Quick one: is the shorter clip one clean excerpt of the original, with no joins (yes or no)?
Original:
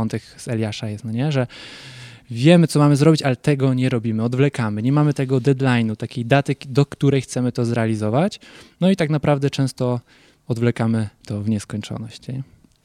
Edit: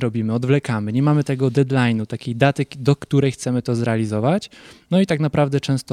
yes